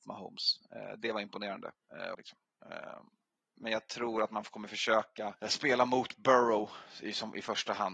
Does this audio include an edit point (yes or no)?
yes